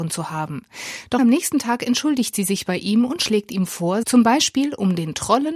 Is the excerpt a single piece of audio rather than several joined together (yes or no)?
no